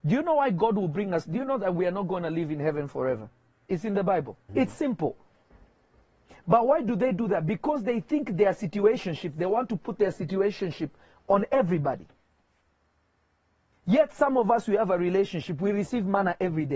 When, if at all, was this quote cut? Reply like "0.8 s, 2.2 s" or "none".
4.5 s